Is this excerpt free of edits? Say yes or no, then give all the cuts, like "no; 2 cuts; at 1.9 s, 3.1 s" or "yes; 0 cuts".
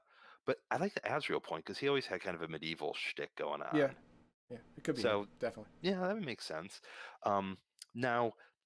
yes; 0 cuts